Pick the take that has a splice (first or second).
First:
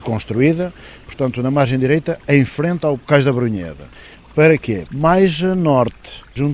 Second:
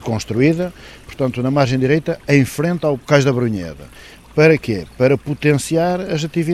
first